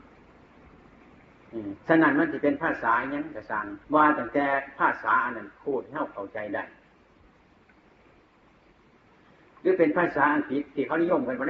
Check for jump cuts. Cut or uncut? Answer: cut